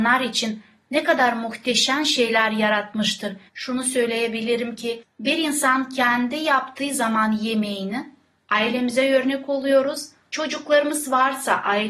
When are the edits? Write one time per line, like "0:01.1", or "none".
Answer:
0:03.5
0:10.3